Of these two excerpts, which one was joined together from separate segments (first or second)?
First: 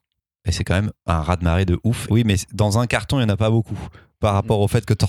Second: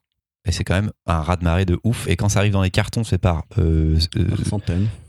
first